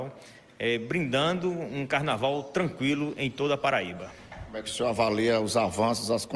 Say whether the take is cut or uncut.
uncut